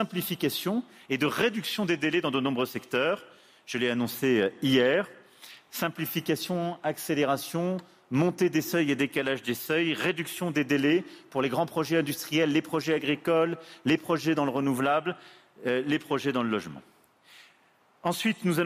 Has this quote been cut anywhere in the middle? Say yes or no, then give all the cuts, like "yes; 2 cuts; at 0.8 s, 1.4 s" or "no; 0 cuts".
no; 0 cuts